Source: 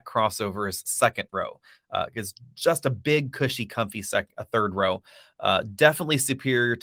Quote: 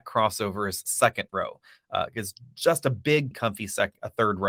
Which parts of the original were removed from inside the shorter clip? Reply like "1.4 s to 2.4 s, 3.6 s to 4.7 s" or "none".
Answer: 3.3 s to 3.7 s